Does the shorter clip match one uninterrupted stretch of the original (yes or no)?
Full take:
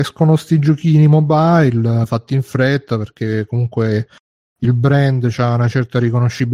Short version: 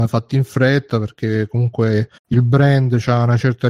no